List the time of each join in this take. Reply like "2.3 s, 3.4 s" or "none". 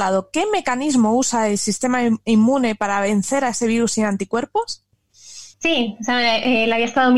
5.5 s